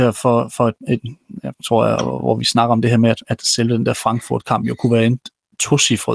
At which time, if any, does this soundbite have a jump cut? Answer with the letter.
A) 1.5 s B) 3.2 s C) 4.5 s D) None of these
A